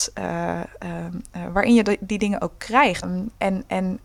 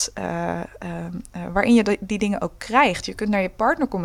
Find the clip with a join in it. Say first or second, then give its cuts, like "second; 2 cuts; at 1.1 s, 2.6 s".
first; 1 cut; at 3.0 s